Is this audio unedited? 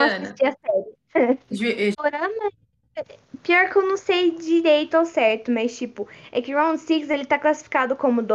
no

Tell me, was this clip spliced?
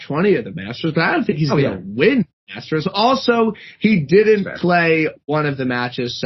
no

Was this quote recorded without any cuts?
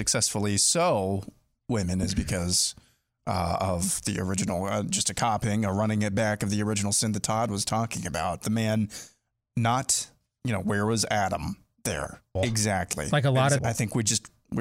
no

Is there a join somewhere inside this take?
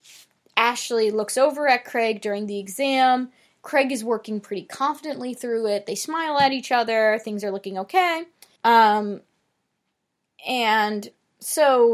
yes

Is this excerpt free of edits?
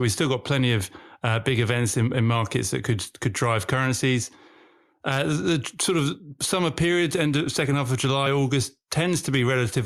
yes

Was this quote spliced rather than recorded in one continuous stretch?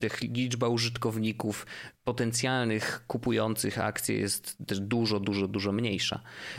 no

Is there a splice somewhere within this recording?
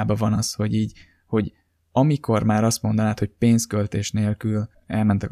no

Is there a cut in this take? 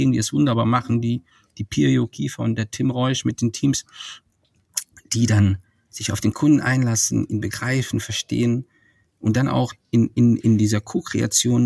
no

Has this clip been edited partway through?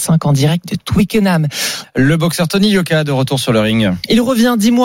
yes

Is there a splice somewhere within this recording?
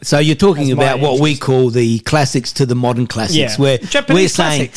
no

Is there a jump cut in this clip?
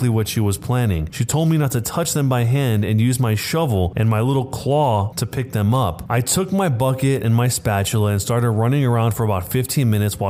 no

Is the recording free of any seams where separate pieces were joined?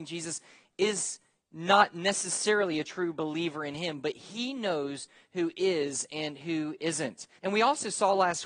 no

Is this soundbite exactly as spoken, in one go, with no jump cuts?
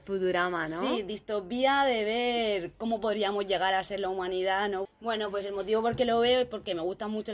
no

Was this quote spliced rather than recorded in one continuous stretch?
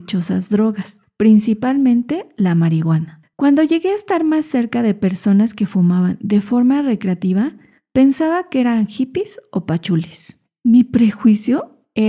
no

